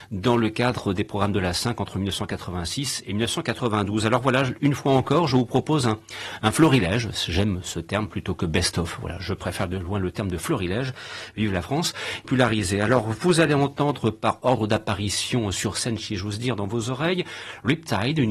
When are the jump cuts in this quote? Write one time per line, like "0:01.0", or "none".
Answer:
0:12.2